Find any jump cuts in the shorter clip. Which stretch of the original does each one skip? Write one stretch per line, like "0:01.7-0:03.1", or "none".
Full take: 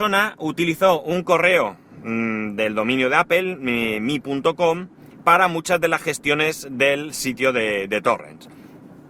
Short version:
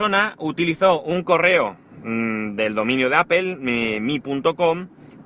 none